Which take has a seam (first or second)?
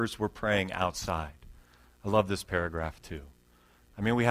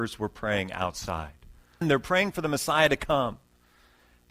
second